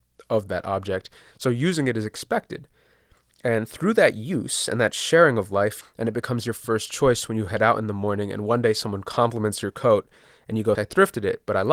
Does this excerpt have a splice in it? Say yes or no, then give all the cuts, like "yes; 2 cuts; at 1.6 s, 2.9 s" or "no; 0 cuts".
yes; 2 cuts; at 5.8 s, 10.8 s